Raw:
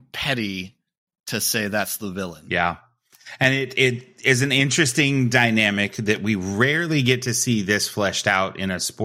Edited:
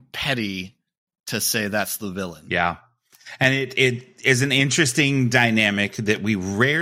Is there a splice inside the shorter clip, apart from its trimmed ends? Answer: no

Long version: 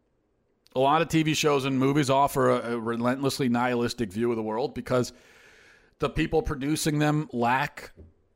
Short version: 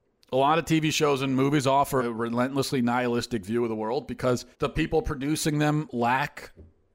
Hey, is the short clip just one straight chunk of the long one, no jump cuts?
no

